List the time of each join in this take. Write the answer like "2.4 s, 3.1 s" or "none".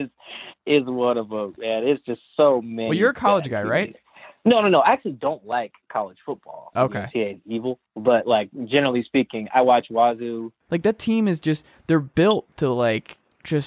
6.7 s, 10.6 s